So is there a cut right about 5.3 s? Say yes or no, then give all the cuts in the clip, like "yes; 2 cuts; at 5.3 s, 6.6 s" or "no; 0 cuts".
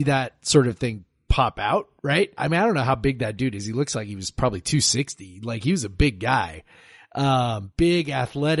no; 1 cut; at 2.3 s